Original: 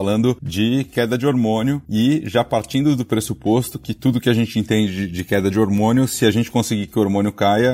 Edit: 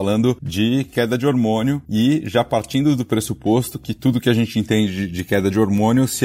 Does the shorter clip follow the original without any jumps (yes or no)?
yes